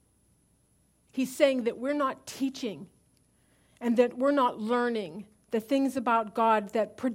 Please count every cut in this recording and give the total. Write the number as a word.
one